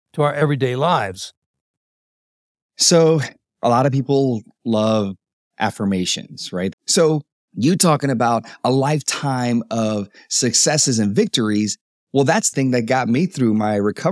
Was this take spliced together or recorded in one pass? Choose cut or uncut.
cut